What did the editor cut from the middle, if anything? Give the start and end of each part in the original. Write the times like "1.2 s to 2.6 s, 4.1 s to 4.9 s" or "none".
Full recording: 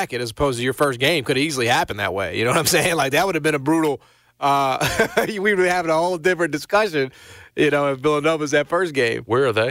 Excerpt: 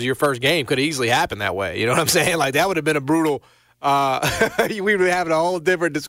none